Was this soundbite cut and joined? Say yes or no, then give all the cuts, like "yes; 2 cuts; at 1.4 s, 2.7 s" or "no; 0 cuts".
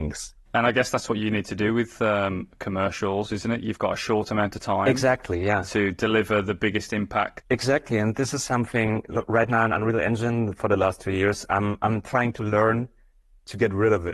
no; 0 cuts